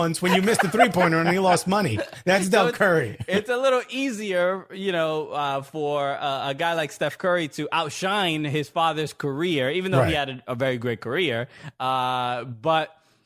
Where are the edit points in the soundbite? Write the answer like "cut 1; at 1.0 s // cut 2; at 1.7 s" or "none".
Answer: none